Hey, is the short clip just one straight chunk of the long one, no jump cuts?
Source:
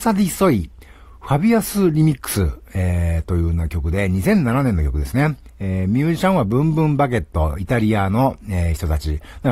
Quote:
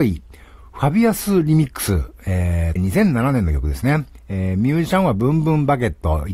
no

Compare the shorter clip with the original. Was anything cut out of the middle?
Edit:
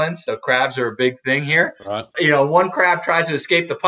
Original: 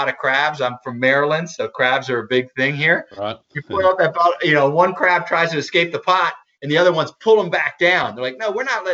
yes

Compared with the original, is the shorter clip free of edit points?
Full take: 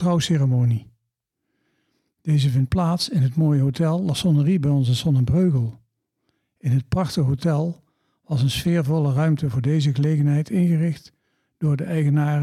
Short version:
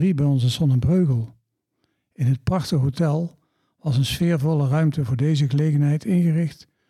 yes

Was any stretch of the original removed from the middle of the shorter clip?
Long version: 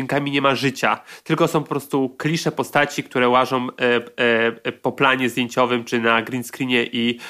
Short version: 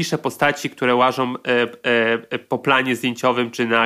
no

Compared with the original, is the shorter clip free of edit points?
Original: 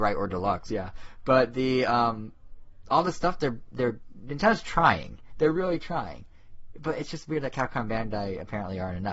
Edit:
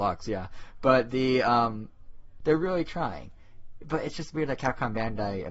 no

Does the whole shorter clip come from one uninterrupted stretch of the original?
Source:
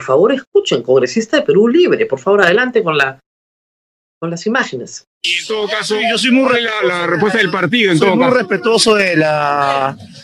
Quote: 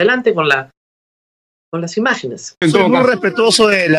no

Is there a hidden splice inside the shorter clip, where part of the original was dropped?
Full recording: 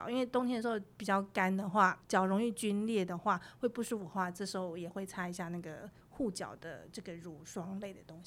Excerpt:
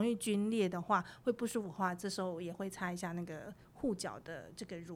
no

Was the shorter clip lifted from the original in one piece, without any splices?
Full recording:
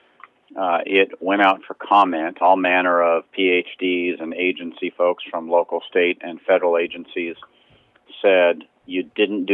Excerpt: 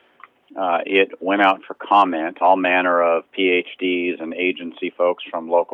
yes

